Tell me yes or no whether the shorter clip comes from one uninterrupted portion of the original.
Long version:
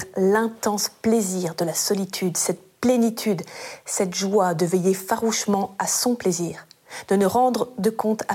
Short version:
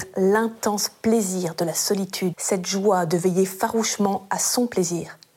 no